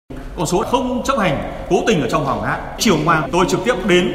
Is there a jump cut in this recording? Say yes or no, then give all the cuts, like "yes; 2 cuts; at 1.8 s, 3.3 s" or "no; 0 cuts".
no; 0 cuts